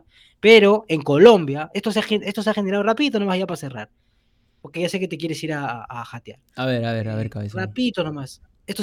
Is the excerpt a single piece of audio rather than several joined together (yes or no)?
yes